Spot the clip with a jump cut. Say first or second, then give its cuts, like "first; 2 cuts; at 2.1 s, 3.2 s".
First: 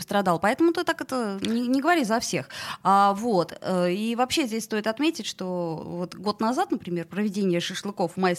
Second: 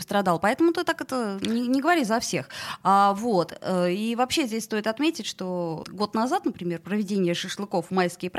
second; 1 cut; at 5.8 s